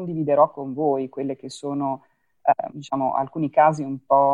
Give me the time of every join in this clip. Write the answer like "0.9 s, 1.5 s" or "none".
2.7 s